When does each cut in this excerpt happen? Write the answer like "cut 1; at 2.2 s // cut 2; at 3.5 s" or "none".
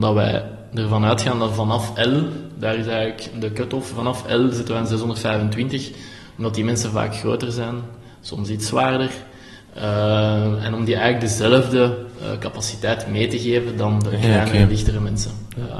none